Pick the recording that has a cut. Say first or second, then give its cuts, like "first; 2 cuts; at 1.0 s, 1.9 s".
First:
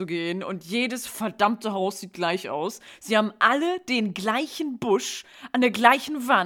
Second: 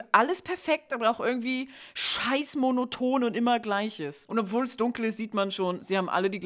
second; 1 cut; at 4.3 s